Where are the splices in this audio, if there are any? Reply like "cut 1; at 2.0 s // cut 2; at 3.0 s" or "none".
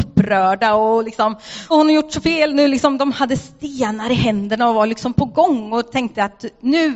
cut 1; at 1.7 s